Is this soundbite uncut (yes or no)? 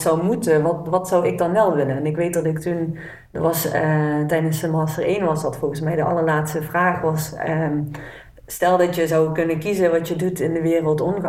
yes